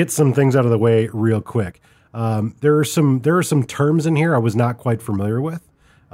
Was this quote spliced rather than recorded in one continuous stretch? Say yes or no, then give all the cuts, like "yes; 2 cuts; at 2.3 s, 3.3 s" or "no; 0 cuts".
no; 0 cuts